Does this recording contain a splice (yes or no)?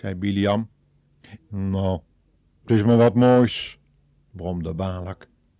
yes